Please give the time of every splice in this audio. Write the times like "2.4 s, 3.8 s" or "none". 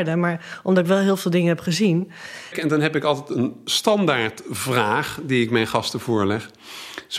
2.5 s